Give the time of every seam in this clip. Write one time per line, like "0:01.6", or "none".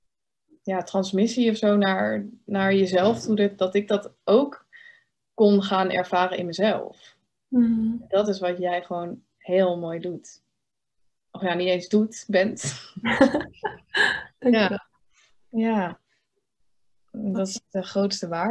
none